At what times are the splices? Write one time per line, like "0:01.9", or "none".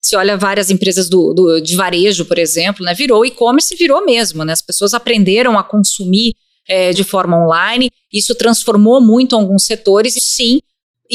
0:06.9
0:10.2